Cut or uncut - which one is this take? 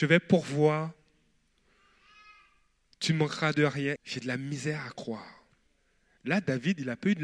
cut